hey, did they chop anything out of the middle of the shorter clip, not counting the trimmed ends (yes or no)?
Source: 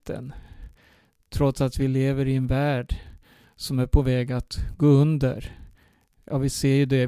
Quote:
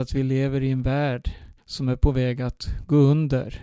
yes